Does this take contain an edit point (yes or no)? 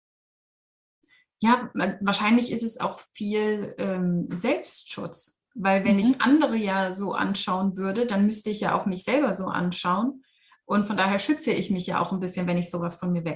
no